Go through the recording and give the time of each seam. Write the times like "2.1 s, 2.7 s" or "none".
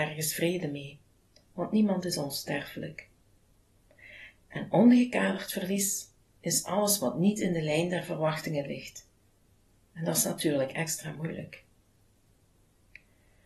none